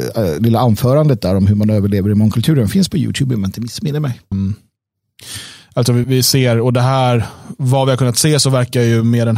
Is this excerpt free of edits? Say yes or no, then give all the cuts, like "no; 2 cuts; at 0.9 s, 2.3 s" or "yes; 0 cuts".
no; 2 cuts; at 4.3 s, 6.0 s